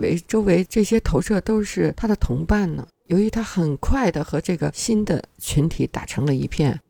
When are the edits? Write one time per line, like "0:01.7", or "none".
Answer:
0:03.0